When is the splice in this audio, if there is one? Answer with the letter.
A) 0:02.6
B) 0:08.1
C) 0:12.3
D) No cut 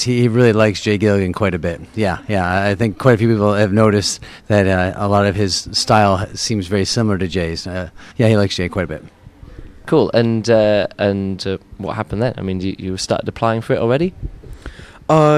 B